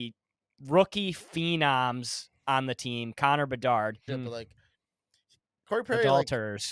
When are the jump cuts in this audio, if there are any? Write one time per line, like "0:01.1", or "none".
0:04.1